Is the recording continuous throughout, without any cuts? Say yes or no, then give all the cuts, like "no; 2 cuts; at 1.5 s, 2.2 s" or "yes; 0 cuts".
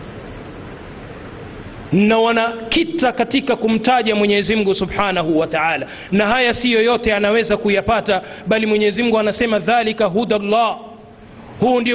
yes; 0 cuts